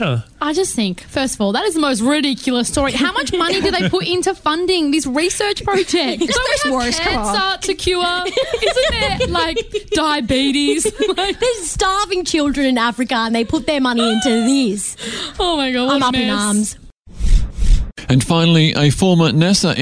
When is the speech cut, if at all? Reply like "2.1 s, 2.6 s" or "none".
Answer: 6.3 s